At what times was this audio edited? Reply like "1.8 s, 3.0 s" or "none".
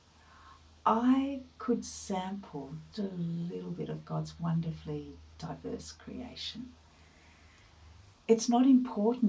2.9 s, 8.1 s